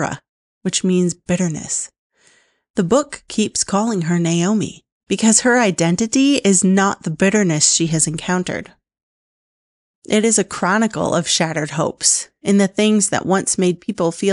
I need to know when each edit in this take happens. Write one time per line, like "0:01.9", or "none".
0:09.9